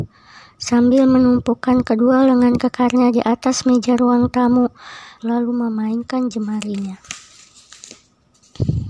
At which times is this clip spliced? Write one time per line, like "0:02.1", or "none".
0:05.2